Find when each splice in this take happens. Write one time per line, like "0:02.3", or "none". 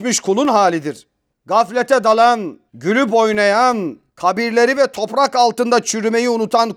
0:01.3
0:02.7
0:04.1